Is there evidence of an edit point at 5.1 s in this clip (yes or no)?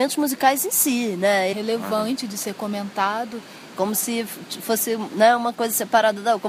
no